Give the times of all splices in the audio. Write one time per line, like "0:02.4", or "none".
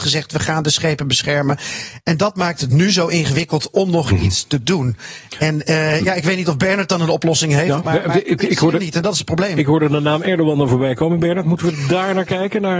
none